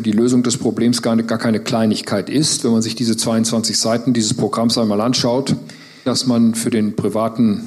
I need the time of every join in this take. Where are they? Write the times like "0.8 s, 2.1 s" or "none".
6.1 s